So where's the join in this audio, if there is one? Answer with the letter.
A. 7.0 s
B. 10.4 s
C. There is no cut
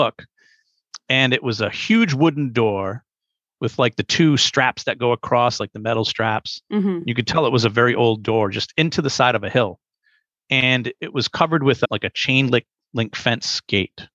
C